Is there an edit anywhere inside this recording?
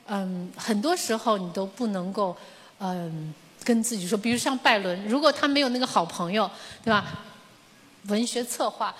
yes; 1 cut; at 8.0 s

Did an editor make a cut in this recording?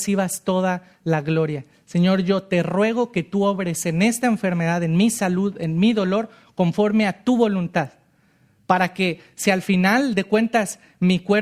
no; 0 cuts

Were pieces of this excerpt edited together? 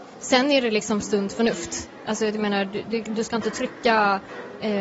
no; 0 cuts

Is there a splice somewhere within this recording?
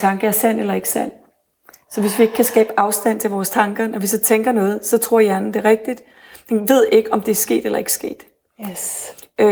no; 0 cuts

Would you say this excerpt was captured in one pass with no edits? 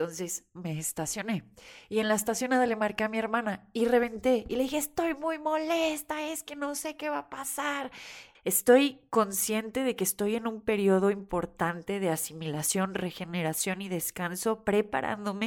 no; 1 cut; at 8.3 s

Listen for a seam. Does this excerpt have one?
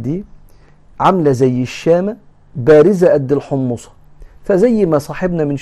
no; 0 cuts

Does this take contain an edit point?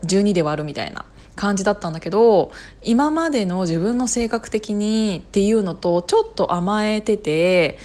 no; 0 cuts

